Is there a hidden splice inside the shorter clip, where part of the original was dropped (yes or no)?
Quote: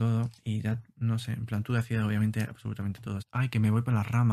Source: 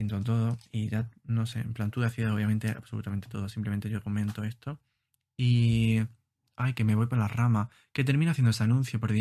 yes